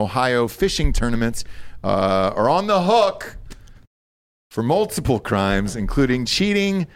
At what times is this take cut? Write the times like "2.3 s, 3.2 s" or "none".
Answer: none